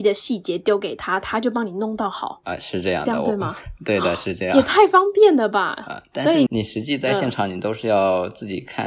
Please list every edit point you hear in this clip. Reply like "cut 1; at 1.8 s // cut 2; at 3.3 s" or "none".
cut 1; at 6.5 s